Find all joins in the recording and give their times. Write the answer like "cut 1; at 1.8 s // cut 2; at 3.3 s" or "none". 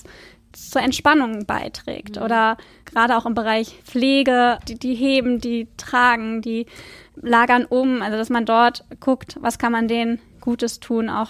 cut 1; at 3.8 s